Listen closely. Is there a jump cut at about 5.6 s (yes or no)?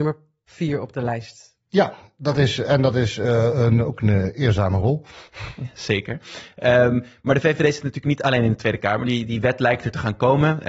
no